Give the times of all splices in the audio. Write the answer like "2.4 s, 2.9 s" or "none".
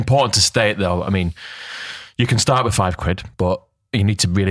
none